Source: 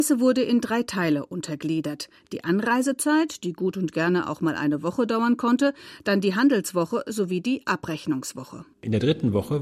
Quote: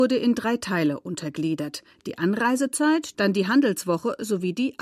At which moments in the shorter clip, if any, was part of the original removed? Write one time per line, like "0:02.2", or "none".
0:03.1